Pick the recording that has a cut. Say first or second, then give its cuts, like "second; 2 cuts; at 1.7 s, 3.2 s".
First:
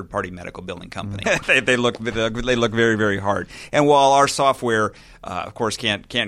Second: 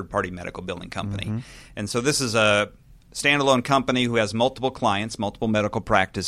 first; 1 cut; at 1.2 s